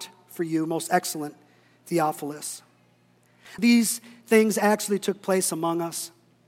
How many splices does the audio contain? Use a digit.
1